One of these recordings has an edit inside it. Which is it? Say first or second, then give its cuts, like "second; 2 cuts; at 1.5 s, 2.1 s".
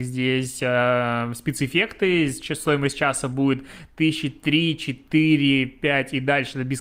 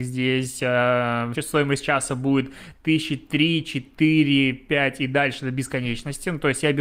second; 1 cut; at 1.3 s